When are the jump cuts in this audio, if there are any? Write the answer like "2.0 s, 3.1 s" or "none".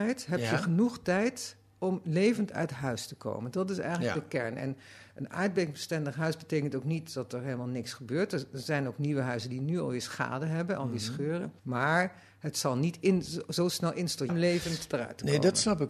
11.6 s, 14.3 s